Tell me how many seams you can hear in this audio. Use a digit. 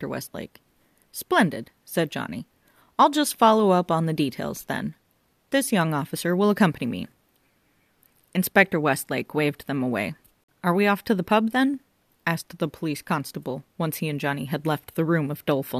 0